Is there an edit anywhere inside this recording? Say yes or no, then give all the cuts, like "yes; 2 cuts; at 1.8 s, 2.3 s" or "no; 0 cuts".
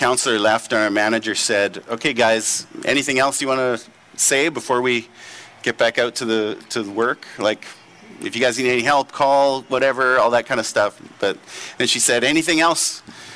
no; 0 cuts